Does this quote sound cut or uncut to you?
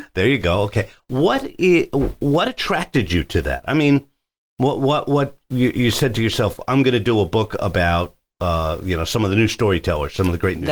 uncut